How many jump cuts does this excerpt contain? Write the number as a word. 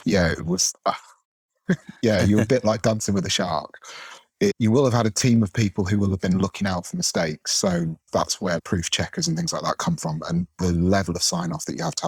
one